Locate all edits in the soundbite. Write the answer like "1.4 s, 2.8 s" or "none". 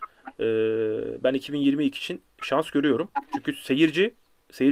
none